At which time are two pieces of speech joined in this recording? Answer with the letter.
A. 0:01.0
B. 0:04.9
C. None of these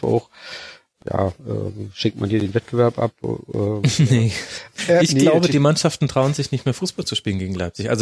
A